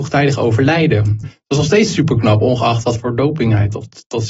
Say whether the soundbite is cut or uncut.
cut